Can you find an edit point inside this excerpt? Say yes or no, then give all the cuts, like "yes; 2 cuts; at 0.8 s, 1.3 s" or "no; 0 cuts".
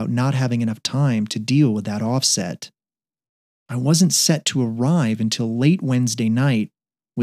no; 0 cuts